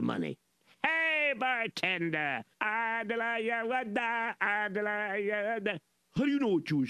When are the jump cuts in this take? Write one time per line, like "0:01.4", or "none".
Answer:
0:02.5

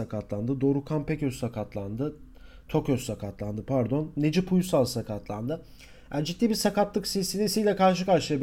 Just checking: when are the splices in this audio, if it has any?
none

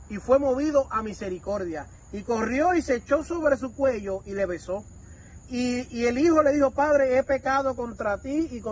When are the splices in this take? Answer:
none

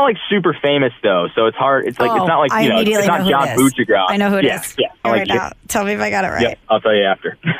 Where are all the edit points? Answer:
0:05.0
0:06.6

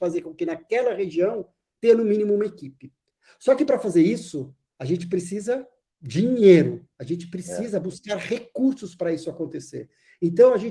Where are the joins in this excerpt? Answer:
none

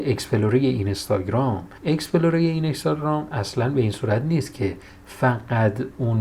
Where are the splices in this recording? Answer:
0:01.8

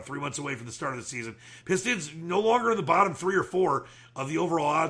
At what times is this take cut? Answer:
none

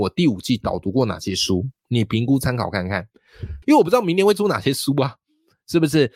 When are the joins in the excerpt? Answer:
0:03.6

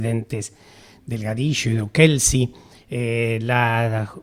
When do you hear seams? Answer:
none

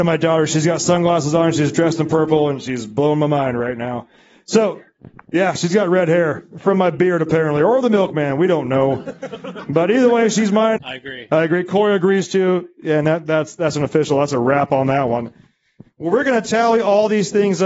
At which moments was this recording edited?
0:10.8

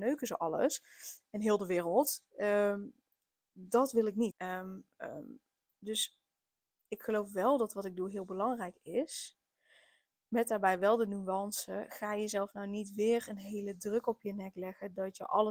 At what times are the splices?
0:04.3

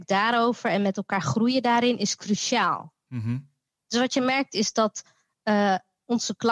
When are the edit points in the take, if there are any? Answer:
none

